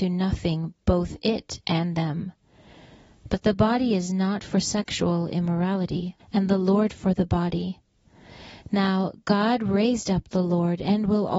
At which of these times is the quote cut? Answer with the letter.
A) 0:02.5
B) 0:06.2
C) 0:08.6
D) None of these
B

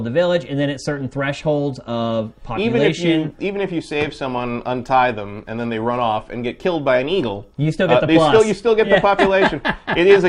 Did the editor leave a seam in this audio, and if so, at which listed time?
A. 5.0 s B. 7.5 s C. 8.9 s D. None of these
D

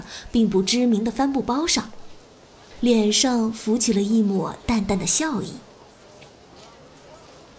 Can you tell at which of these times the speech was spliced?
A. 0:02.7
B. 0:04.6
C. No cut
A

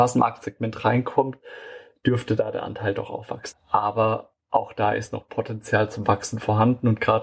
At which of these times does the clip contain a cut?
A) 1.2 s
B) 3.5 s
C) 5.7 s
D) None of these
B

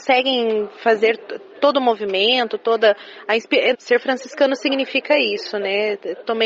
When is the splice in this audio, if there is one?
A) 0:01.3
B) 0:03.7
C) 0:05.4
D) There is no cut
B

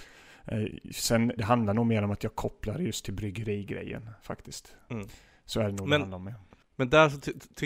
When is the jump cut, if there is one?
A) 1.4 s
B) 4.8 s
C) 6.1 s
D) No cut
A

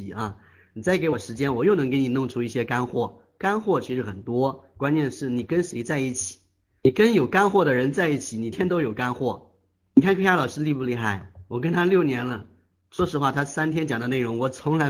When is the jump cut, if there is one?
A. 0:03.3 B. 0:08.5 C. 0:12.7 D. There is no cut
B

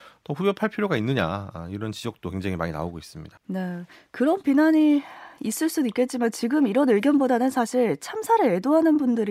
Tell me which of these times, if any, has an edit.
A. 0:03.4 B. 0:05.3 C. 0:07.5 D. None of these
A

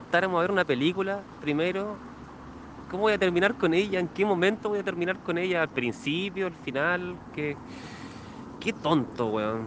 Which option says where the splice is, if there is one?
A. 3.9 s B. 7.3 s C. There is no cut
C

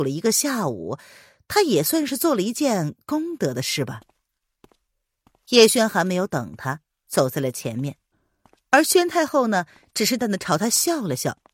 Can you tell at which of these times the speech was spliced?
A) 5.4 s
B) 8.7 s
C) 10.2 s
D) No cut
C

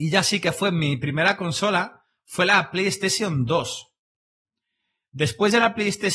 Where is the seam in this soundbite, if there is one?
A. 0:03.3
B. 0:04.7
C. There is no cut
C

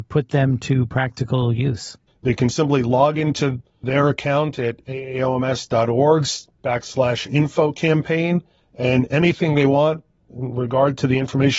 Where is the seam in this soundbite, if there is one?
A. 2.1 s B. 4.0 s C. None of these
A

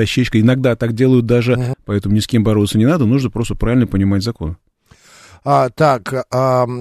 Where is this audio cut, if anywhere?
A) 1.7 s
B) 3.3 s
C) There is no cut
A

